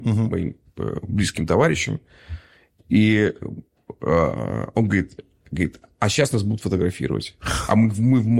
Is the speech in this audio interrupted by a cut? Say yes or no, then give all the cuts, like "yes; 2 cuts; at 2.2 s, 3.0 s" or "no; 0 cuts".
no; 0 cuts